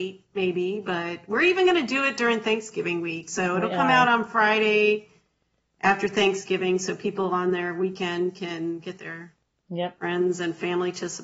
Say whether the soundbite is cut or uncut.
uncut